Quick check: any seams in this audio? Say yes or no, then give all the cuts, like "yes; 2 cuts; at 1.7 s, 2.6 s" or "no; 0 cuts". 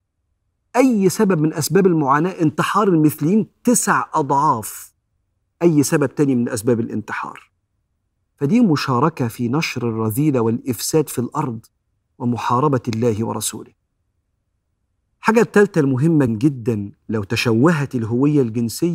yes; 1 cut; at 16.3 s